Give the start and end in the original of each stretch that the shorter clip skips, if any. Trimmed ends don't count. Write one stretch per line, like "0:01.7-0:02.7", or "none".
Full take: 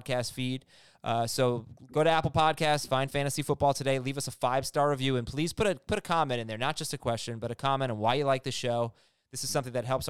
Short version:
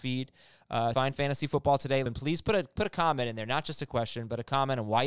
0:01.3-0:02.9
0:04.0-0:05.2

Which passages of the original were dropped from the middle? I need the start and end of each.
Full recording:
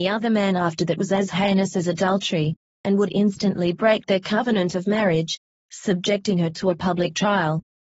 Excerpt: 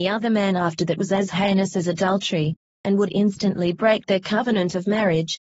none

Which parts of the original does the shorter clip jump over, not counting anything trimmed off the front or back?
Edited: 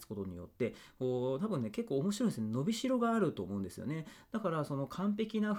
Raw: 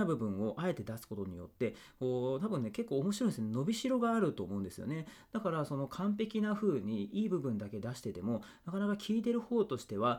none

